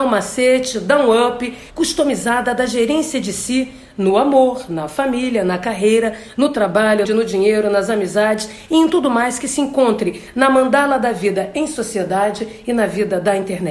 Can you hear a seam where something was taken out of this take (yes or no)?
yes